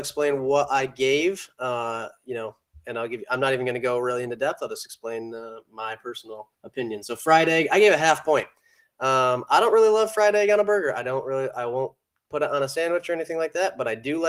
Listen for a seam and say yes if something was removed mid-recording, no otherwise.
yes